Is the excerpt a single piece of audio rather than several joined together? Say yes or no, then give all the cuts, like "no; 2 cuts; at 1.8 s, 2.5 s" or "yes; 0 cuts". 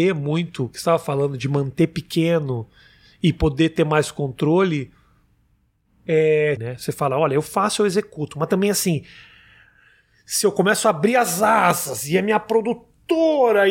no; 1 cut; at 6.6 s